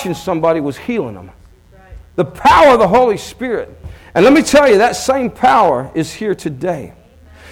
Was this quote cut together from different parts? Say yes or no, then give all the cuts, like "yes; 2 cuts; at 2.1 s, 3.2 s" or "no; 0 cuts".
no; 0 cuts